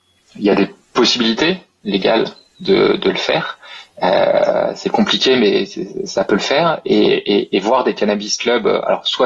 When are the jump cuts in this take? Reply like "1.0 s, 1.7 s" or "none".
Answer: none